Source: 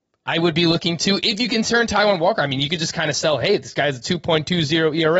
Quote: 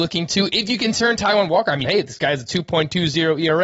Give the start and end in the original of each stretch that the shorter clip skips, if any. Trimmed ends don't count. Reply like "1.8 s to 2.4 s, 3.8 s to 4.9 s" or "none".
2.6 s to 3.4 s